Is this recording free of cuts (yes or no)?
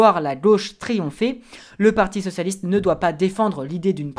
yes